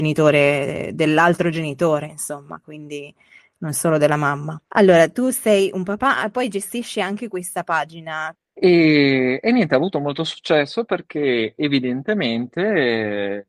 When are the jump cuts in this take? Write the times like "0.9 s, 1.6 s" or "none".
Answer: 4.6 s, 8.4 s